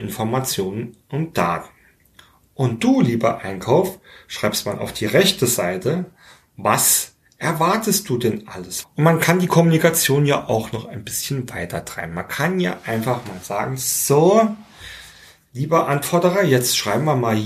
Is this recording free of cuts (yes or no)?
no